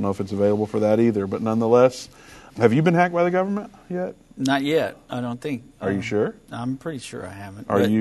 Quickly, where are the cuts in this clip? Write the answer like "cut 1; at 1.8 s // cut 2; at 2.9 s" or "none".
cut 1; at 2.5 s